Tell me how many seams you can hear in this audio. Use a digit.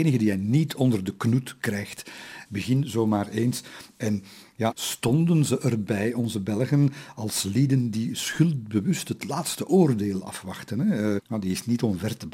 3